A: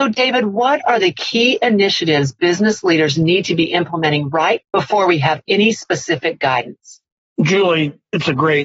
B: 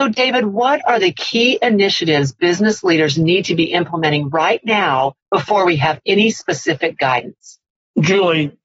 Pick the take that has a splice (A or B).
A